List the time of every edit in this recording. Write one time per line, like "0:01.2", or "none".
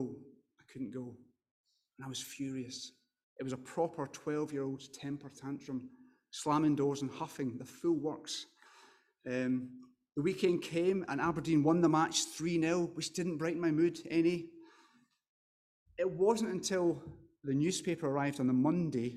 none